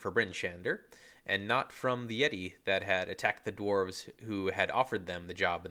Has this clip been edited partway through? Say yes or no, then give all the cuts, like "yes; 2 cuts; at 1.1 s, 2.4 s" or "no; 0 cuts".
no; 0 cuts